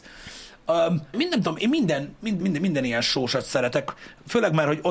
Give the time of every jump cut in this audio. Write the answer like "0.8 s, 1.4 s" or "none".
1.1 s, 2.4 s